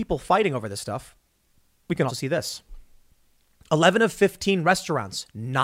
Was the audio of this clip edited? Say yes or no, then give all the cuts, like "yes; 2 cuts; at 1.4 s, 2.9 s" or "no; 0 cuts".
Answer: yes; 1 cut; at 2.1 s